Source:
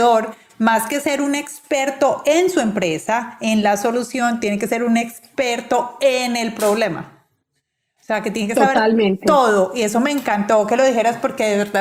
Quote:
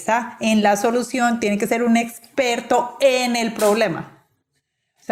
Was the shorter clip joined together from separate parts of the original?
no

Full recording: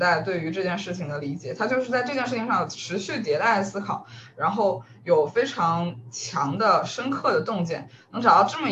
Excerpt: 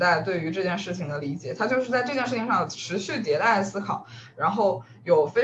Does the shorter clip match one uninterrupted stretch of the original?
yes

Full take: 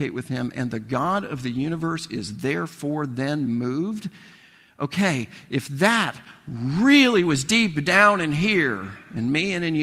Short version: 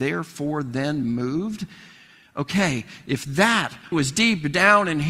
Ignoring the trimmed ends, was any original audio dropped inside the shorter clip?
yes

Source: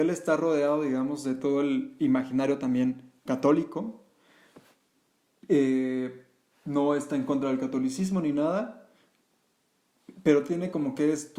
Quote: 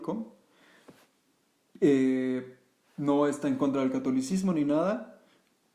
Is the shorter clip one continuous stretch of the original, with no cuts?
yes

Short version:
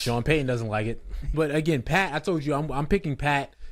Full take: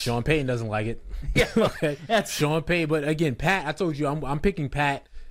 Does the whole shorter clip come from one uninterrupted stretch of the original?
no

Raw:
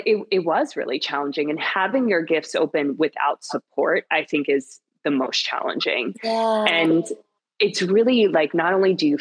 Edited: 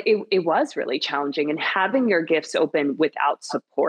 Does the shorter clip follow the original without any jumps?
yes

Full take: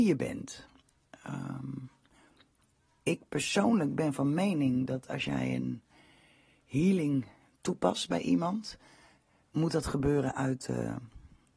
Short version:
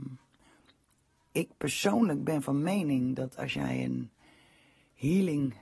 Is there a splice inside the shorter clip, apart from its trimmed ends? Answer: no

